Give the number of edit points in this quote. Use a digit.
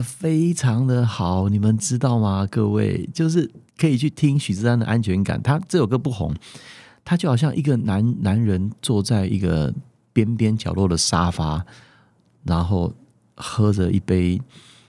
0